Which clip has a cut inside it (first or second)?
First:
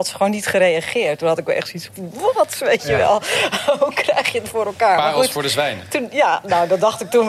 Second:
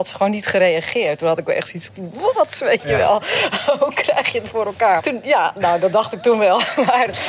second